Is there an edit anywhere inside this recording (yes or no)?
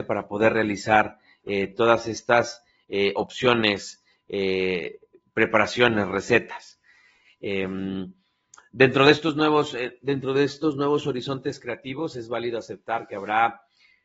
no